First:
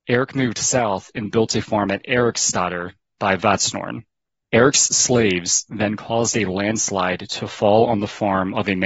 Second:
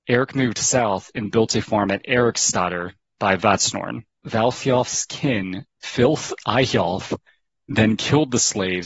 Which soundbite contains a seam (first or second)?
second